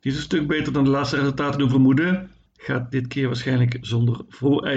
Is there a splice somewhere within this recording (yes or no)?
yes